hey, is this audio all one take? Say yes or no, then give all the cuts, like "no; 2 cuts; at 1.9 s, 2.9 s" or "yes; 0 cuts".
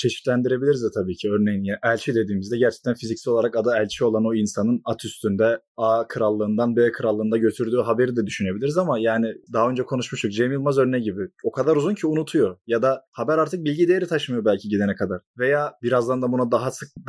yes; 0 cuts